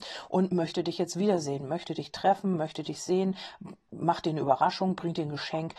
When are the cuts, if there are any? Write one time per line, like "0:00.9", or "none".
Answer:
none